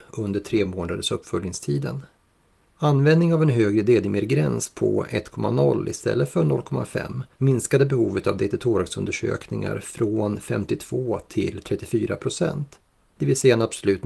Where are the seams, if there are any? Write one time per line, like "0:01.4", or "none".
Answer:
0:02.7
0:07.3

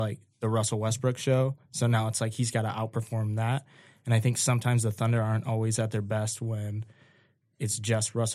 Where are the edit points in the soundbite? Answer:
none

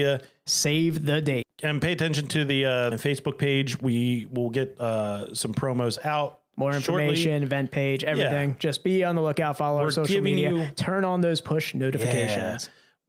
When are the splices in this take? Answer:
0:01.4
0:02.9

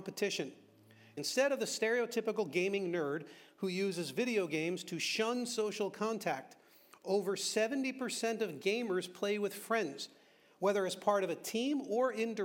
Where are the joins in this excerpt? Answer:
0:01.2

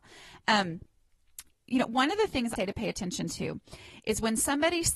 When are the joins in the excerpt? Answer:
0:01.5
0:02.6

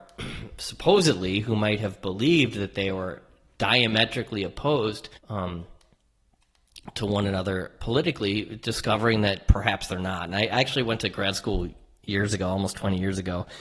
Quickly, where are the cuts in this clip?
0:05.2

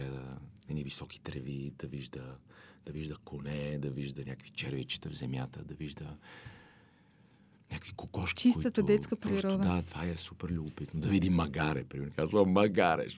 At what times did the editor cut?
none

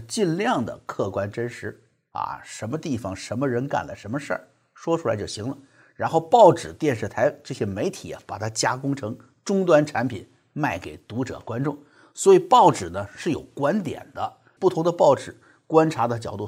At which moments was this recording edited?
0:14.6

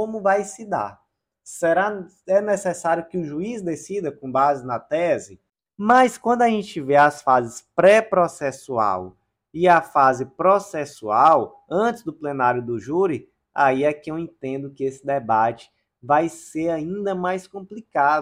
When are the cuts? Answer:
0:05.7

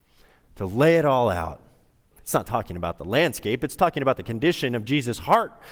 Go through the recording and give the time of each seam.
0:02.1

